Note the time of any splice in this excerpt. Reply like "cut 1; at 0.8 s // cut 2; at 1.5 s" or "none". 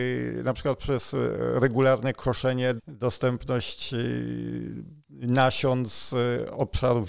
cut 1; at 2.8 s // cut 2; at 5.0 s